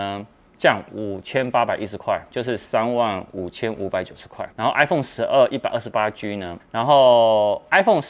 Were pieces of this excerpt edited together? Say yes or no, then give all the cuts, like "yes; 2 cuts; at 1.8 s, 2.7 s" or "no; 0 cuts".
yes; 2 cuts; at 4.5 s, 6.6 s